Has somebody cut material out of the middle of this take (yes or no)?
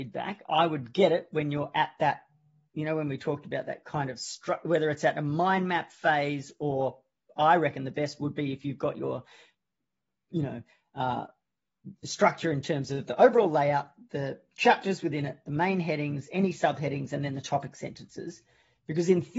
no